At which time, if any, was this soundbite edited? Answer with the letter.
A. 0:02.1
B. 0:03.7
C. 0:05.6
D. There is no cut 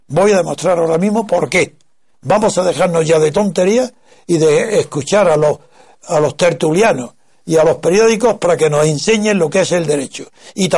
A